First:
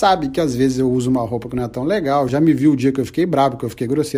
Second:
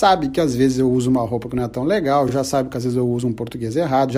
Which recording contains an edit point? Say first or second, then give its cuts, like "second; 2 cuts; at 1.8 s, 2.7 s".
first; 1 cut; at 2.3 s